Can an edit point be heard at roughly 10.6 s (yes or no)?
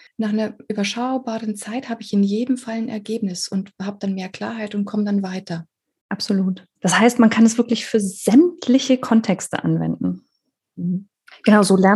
yes